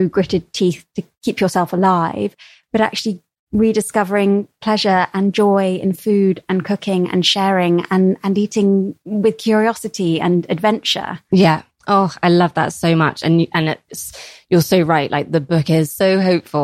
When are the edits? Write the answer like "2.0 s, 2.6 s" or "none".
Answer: none

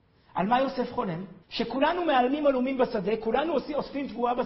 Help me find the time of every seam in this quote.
1.4 s

